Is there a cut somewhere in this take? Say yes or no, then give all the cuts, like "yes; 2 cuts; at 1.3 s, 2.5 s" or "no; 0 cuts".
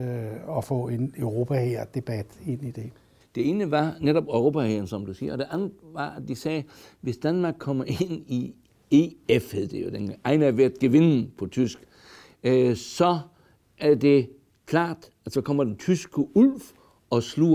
yes; 1 cut; at 3.2 s